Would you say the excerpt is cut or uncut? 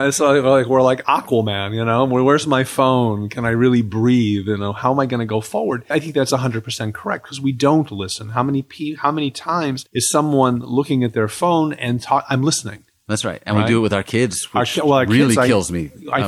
uncut